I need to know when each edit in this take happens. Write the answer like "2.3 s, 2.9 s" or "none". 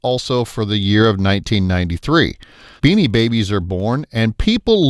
2.8 s